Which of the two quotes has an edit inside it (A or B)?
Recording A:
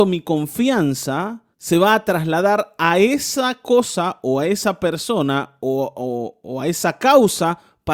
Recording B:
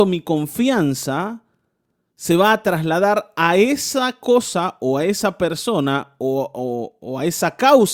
A